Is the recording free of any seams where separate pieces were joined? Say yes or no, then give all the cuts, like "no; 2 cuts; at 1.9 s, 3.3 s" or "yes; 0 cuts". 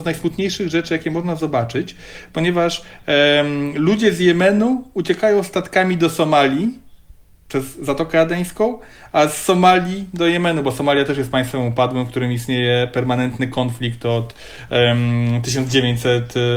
yes; 0 cuts